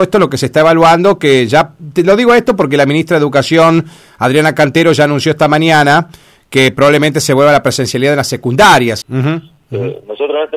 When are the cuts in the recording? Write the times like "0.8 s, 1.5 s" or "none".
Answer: 9.0 s